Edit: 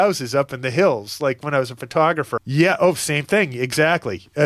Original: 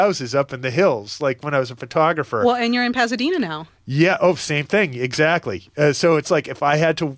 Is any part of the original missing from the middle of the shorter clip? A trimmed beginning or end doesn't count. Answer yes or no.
yes